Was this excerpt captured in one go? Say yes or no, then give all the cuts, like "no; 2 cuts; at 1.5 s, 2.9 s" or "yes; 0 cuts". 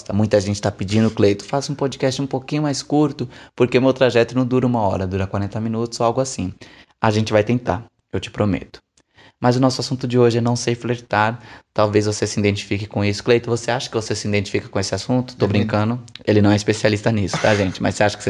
yes; 0 cuts